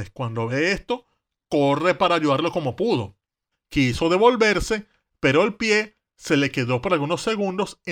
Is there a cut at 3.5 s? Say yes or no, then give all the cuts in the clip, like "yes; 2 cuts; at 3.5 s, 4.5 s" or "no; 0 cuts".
yes; 1 cut; at 3.5 s